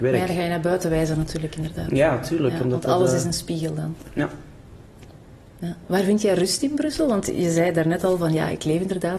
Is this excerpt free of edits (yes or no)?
yes